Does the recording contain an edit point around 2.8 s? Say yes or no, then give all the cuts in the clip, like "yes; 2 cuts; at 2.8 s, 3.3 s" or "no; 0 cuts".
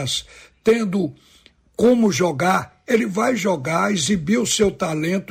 no; 0 cuts